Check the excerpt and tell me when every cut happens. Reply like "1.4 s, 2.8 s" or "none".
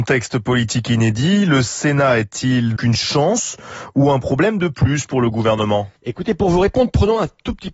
2.8 s, 6.0 s